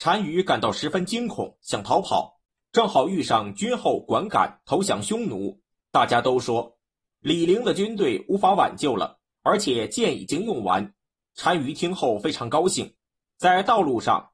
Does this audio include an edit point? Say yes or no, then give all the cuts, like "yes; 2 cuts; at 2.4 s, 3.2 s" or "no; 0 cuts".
no; 0 cuts